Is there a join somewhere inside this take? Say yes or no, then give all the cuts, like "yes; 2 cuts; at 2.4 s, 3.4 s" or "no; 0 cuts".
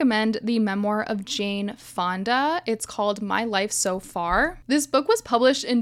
no; 0 cuts